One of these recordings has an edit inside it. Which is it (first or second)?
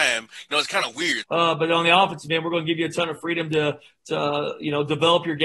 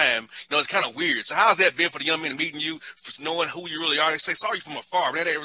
first